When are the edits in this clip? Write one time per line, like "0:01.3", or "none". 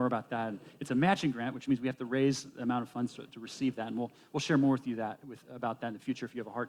none